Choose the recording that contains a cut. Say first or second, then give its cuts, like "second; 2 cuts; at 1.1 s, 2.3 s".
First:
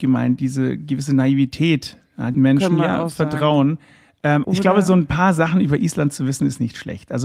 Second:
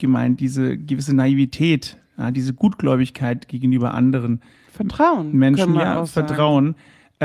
first; 2 cuts; at 2.3 s, 4.4 s